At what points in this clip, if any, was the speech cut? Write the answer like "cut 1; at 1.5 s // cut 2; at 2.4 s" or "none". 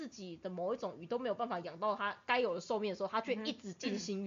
none